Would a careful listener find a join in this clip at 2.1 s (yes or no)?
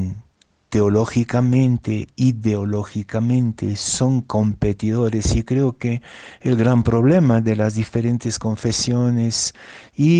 no